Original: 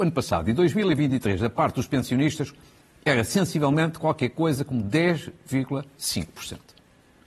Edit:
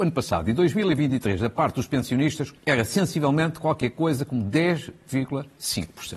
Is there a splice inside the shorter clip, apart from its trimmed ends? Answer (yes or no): yes